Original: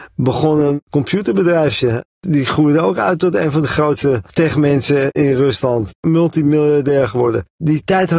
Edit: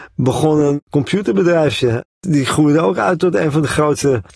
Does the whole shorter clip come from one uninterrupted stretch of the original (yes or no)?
yes